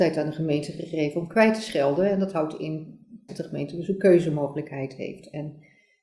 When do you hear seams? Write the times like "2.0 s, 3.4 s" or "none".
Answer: 3.3 s